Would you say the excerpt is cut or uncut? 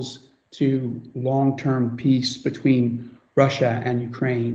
uncut